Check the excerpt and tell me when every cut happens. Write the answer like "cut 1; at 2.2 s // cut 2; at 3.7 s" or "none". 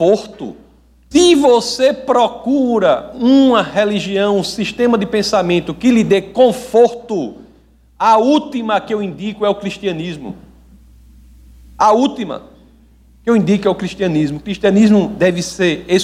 cut 1; at 1.1 s